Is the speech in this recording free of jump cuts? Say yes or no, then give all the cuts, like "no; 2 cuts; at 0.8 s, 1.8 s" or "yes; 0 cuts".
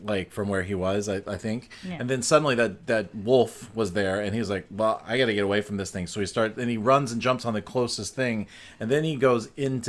yes; 0 cuts